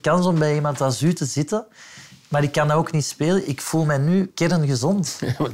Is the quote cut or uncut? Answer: uncut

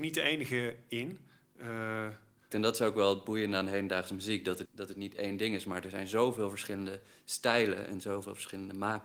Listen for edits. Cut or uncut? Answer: cut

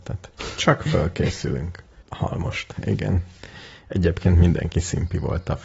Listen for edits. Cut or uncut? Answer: cut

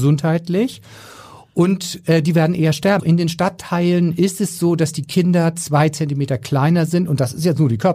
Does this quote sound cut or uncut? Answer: cut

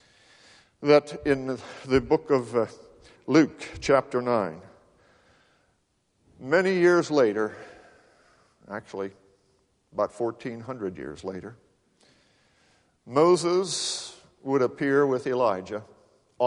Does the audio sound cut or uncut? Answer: uncut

